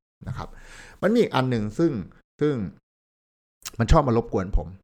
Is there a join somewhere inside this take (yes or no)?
no